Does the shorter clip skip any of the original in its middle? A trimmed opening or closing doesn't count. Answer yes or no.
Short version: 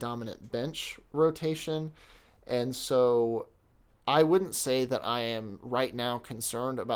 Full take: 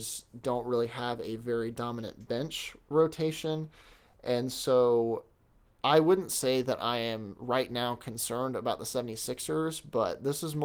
no